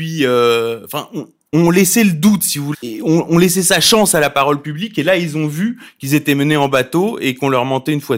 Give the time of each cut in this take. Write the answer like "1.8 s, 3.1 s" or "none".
2.7 s